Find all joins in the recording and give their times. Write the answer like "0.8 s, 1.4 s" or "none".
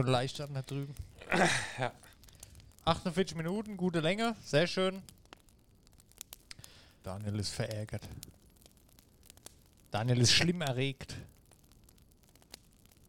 2.7 s, 7.0 s